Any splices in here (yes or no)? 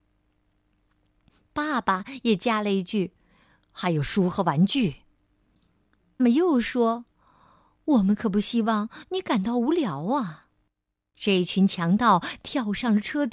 yes